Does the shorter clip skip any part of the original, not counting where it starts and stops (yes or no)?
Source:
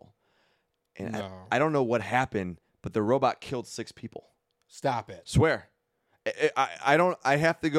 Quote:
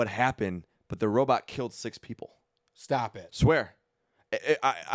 no